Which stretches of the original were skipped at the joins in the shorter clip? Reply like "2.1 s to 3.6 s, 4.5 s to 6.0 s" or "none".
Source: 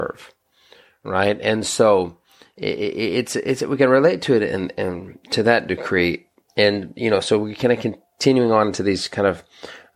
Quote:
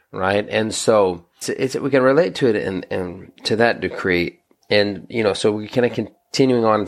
2.3 s to 3.3 s

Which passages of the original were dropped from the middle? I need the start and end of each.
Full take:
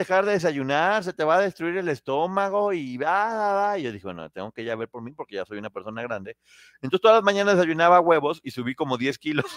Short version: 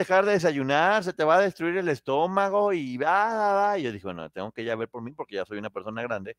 none

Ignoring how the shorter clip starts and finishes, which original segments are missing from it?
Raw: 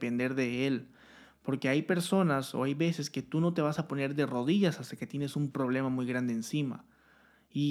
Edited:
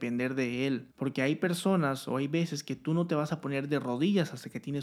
0.9 s to 1.4 s

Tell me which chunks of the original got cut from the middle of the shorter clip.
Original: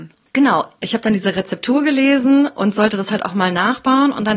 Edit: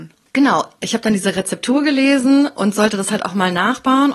none

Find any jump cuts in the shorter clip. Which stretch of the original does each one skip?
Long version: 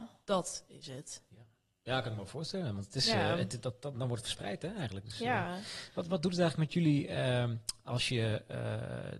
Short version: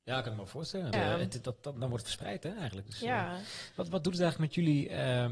2.7 s to 3.1 s

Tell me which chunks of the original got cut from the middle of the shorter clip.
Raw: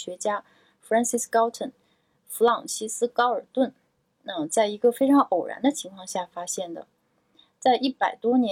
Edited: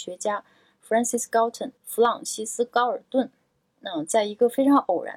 1.8 s to 2.2 s

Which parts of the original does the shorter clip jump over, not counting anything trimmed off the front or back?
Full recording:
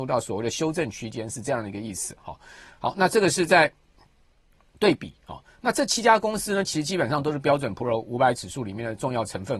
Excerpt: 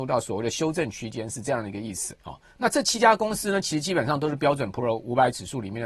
2.2 s to 5.2 s

